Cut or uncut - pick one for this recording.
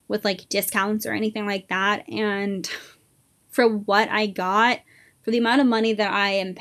uncut